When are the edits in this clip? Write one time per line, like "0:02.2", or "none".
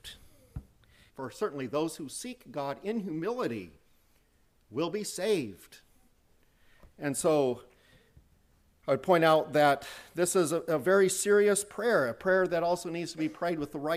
0:01.1